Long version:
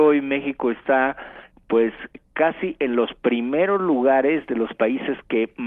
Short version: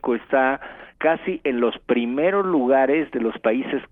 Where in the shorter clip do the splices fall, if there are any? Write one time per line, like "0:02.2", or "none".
0:00.9